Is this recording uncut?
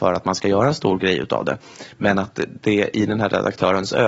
yes; 0 cuts

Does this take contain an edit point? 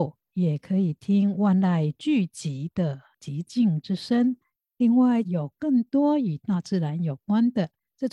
yes; 1 cut; at 5.2 s

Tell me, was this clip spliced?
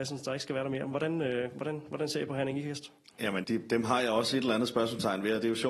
yes; 1 cut; at 3.4 s

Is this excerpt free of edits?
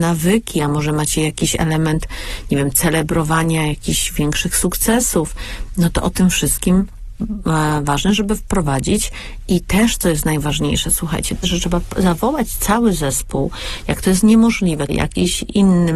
no; 2 cuts; at 11.4 s, 14.9 s

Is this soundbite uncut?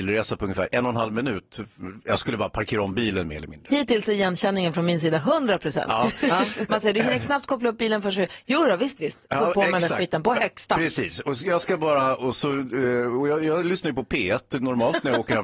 yes; 0 cuts

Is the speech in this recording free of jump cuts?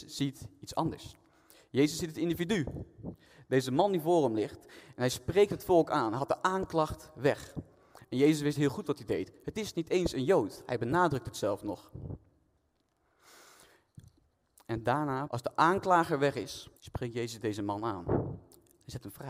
no; 2 cuts; at 15.3 s, 16.8 s

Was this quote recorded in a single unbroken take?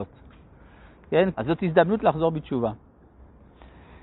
no; 1 cut; at 1.3 s

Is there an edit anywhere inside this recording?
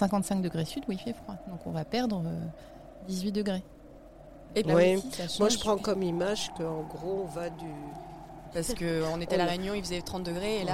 yes; 1 cut; at 8.5 s

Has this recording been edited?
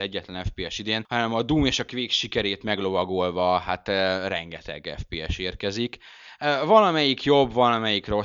no; 0 cuts

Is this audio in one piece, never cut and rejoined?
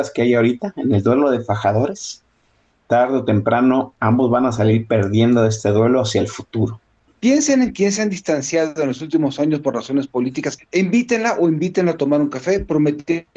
no; 2 cuts; at 7.1 s, 10.6 s

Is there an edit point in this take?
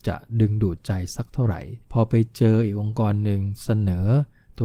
yes; 1 cut; at 1.8 s

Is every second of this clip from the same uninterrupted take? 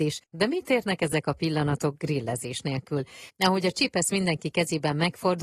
no; 1 cut; at 3.3 s

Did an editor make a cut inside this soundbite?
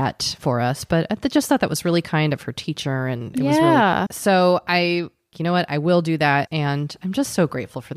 yes; 3 cuts; at 4.1 s, 5.3 s, 6.5 s

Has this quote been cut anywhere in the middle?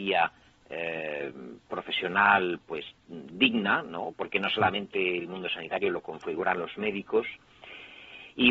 no; 0 cuts

